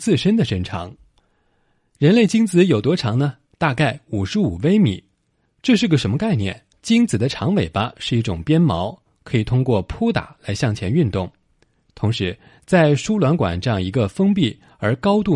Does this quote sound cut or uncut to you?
cut